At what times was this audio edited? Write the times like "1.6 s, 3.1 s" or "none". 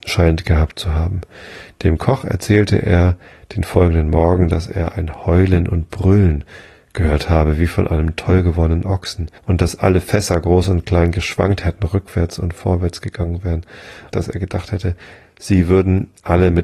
9.4 s, 14.1 s